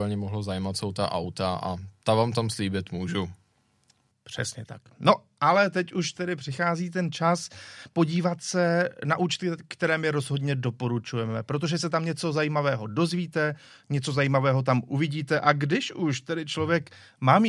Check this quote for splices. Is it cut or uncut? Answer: uncut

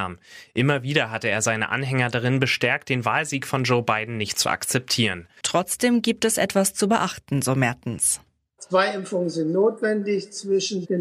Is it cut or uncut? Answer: cut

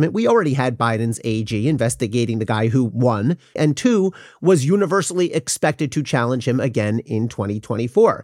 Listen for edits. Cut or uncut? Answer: cut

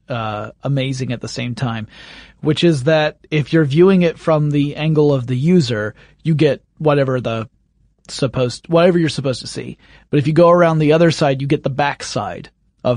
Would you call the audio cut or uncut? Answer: uncut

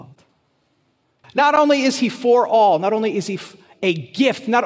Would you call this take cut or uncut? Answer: cut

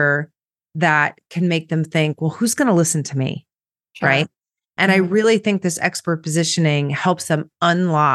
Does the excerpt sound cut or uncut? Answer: uncut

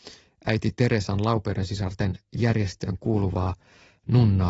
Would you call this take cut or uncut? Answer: uncut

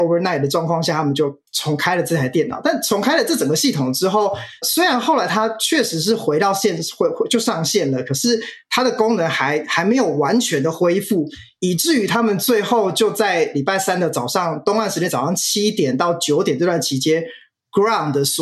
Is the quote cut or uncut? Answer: cut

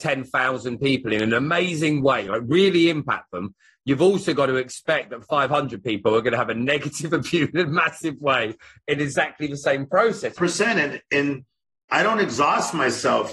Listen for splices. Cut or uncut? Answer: cut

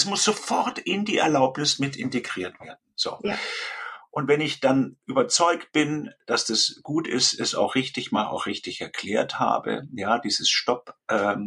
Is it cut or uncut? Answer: uncut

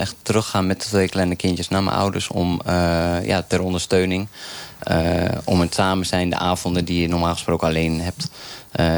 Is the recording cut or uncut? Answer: uncut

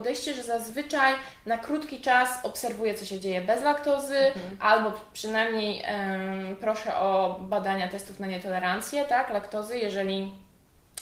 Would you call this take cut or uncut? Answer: uncut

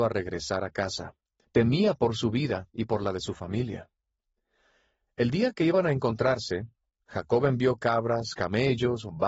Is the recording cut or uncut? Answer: cut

